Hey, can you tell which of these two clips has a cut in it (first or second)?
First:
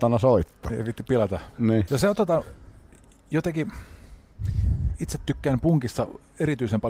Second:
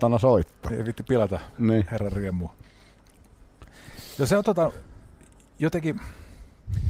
first